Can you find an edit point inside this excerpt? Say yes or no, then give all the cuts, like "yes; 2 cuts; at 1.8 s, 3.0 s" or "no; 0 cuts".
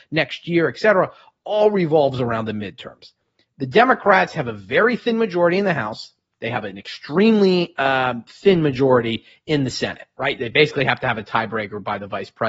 no; 0 cuts